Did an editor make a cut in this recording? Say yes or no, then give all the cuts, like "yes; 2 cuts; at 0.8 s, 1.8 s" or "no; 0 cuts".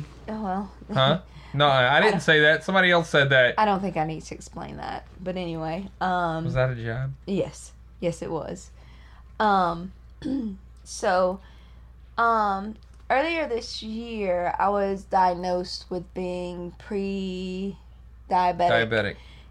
yes; 1 cut; at 5.2 s